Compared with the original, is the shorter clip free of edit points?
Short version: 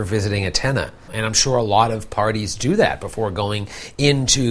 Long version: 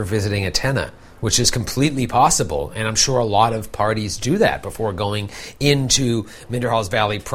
no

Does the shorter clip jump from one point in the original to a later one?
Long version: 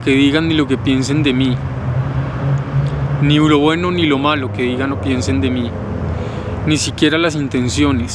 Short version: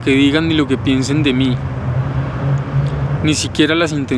yes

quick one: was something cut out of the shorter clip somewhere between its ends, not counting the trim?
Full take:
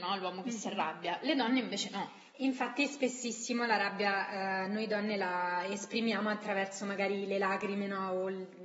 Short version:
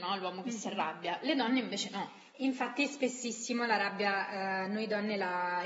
no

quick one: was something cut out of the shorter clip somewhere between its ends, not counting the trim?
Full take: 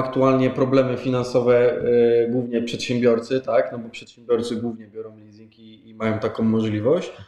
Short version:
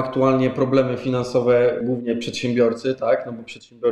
yes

